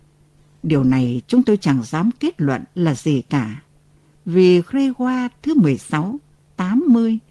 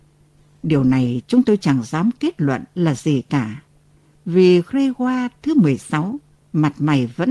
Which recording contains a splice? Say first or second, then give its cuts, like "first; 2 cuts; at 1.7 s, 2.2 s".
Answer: second; 1 cut; at 6.4 s